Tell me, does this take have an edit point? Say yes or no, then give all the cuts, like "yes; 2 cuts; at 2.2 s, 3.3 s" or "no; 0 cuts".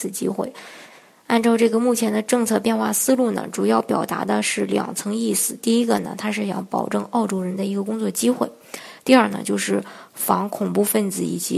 no; 0 cuts